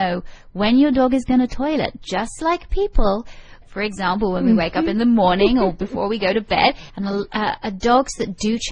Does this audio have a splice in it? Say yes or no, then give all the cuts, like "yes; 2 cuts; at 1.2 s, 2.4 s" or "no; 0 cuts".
yes; 2 cuts; at 3.6 s, 6.9 s